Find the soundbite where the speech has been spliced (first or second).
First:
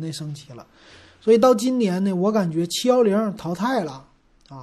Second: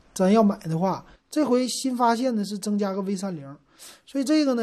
second